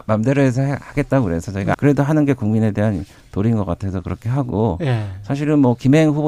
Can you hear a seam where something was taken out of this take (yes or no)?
yes